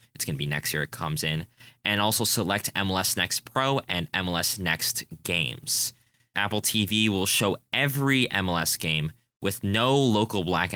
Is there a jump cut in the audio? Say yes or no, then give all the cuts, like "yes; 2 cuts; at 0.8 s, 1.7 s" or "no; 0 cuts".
yes; 1 cut; at 6.3 s